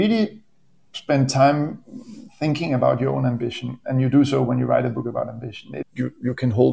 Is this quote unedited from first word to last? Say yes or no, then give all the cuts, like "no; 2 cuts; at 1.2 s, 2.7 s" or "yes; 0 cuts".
no; 1 cut; at 5.8 s